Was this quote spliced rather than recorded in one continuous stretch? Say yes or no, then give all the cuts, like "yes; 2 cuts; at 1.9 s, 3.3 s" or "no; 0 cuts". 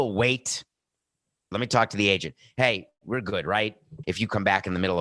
yes; 2 cuts; at 1.5 s, 4.0 s